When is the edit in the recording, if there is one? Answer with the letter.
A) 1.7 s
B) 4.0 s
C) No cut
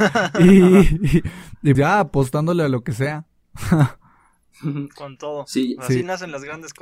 A